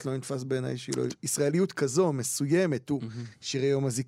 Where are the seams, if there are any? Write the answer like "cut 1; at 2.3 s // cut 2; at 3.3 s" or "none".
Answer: cut 1; at 1.1 s